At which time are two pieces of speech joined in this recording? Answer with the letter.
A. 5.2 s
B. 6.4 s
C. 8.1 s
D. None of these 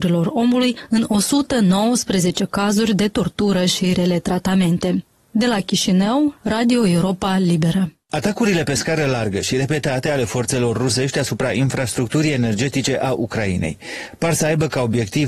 B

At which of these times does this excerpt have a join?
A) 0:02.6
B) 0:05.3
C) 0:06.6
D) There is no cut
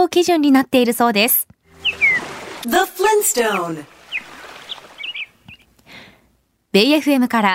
A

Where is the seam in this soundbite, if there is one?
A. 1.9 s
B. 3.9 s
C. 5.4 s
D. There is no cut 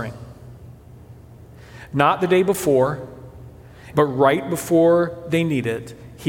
B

